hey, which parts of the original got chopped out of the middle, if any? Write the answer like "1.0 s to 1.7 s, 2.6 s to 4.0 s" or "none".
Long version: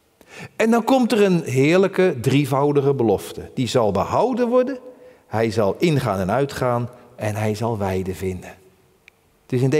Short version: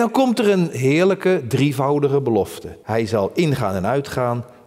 3.5 s to 5.2 s